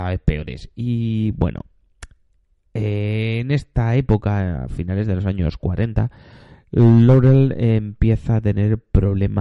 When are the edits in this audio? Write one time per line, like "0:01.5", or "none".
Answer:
none